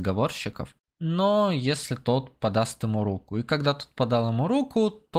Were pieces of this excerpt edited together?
no; 0 cuts

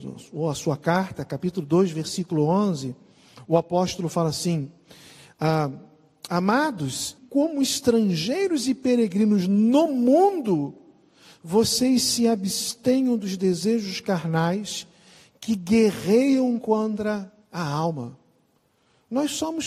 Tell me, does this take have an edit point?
yes; 1 cut; at 7.2 s

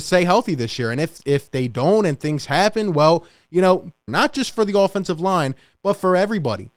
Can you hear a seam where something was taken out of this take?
yes; 1 cut; at 4.1 s

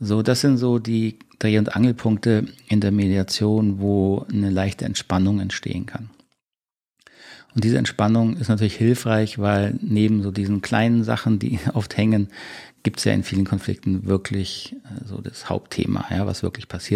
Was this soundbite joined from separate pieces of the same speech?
no; 0 cuts

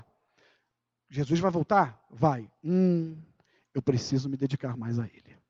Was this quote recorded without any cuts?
yes; 0 cuts

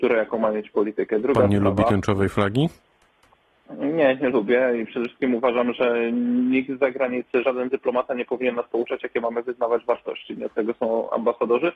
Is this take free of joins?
yes; 0 cuts

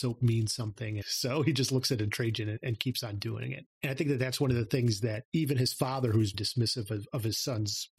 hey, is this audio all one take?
no; 2 cuts; at 1.0 s, 6.3 s

